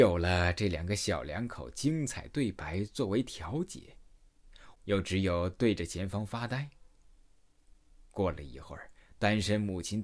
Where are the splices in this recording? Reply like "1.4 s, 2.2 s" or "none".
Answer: 4.7 s